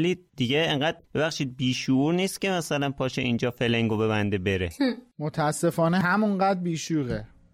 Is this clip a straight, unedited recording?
no; 1 cut; at 1.0 s

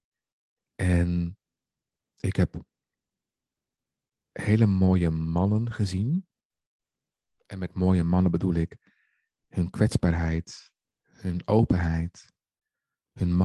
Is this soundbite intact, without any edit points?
no; 1 cut; at 10.8 s

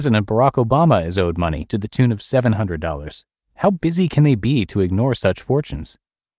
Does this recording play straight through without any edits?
yes; 0 cuts

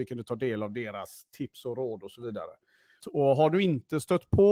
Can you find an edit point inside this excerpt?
yes; 1 cut; at 3.0 s

